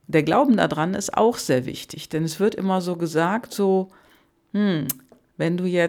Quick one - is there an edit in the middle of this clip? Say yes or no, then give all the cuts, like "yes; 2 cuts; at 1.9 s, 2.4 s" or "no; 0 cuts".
no; 0 cuts